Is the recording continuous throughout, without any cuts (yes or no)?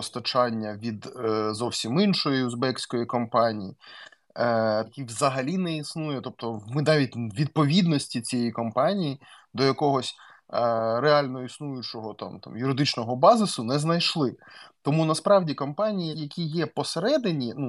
no